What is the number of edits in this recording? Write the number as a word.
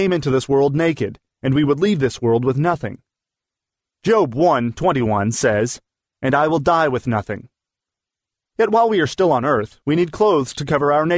one